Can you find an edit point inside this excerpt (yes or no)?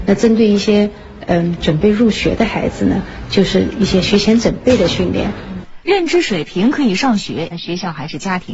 yes